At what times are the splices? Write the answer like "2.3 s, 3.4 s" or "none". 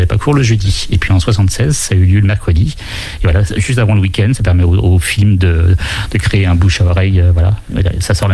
none